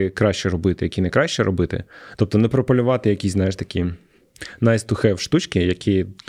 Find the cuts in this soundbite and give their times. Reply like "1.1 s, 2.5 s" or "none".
2.1 s